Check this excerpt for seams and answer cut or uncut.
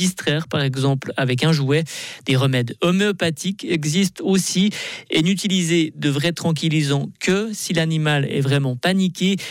uncut